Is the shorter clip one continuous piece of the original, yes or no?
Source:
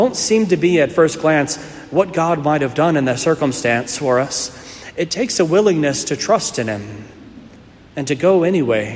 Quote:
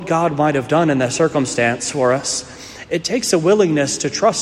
yes